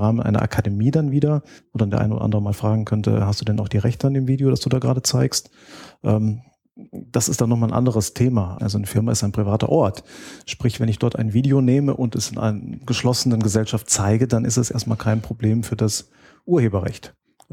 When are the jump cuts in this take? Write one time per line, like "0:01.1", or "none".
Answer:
0:08.6

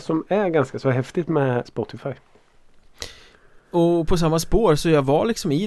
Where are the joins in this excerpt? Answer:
0:01.6

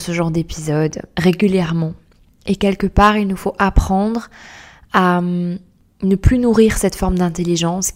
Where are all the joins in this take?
none

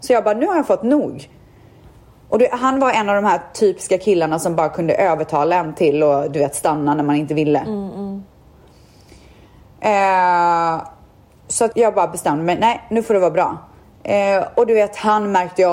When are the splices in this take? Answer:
0:11.7

